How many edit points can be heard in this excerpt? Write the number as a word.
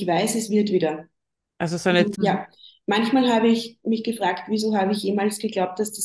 one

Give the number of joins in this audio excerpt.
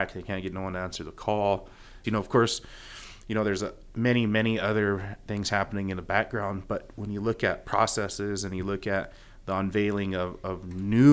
one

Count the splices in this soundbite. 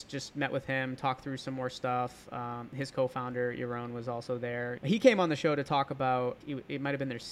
two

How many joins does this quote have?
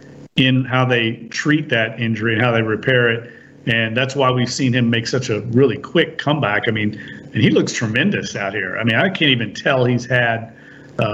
one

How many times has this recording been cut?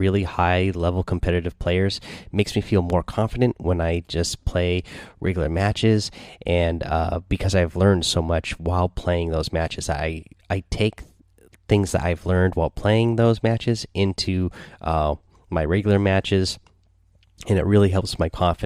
zero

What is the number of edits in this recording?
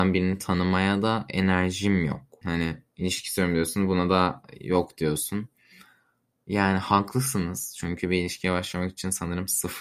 one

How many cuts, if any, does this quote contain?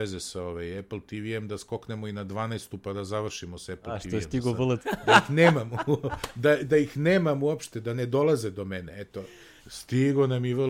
two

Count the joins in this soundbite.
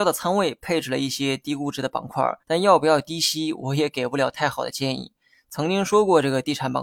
one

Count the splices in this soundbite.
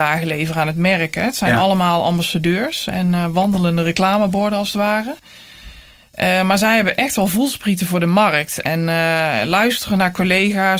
zero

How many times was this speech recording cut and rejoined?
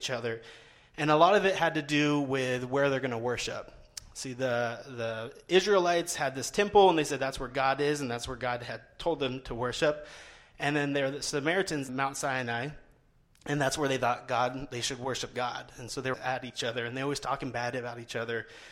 two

